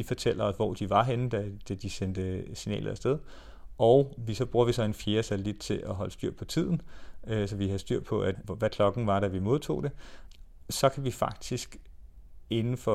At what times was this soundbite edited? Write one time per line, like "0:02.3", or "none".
none